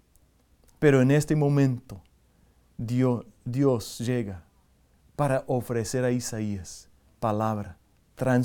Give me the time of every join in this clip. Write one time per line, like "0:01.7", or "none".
none